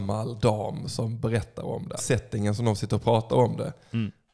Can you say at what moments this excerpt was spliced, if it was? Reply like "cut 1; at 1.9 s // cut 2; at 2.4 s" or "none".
cut 1; at 2.0 s